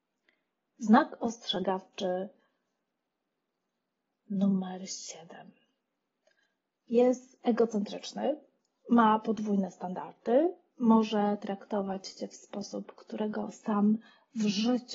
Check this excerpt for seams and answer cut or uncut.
uncut